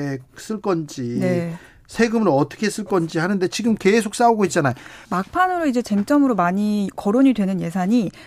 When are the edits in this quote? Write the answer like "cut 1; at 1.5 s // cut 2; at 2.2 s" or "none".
cut 1; at 5.0 s